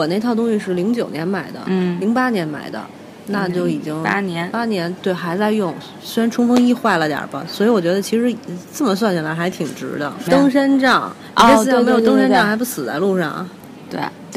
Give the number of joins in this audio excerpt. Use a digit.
1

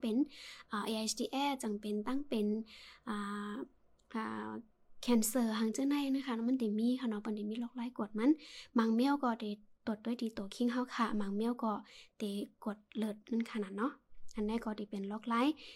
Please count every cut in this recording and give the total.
0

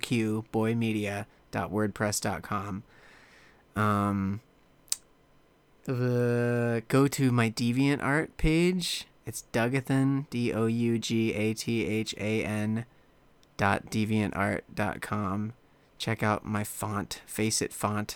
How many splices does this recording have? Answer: 0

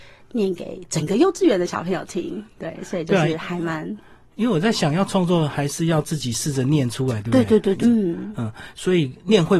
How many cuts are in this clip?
1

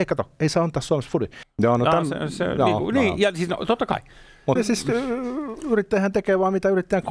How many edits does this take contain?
2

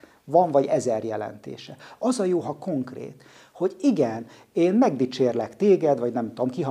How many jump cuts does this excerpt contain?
0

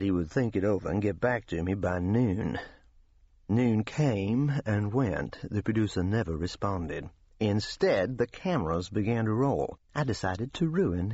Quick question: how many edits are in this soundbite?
1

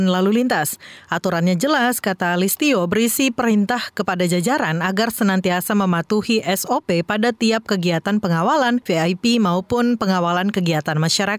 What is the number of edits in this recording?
1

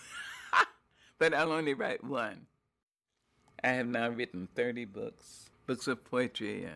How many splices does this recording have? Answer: 0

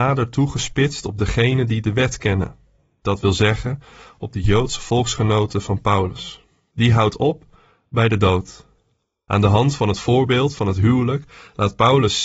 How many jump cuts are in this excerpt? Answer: 1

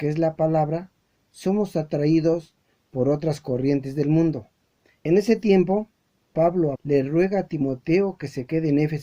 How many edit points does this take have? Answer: 2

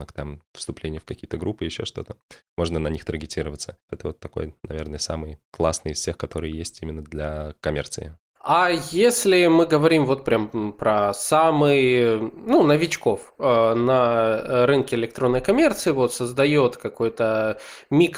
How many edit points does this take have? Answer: 1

